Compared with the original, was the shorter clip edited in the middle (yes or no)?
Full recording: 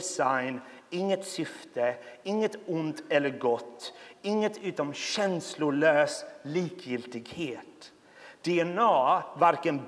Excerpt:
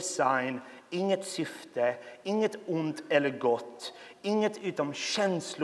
no